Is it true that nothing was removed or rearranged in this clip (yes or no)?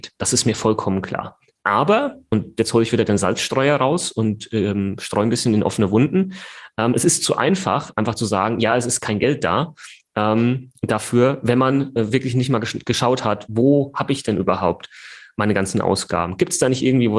yes